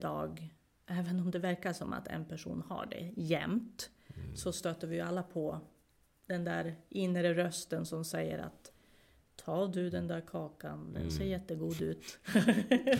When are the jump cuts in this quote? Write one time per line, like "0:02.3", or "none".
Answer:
none